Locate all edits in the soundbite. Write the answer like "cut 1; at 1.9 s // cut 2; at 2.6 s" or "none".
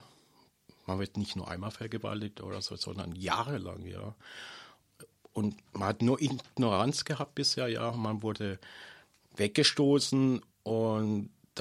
none